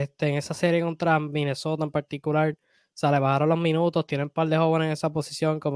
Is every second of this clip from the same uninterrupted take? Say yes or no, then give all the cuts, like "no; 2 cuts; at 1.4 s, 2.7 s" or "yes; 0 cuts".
yes; 0 cuts